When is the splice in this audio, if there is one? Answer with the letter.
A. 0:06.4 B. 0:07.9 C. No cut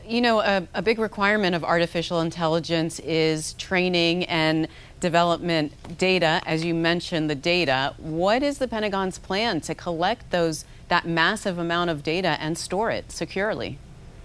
C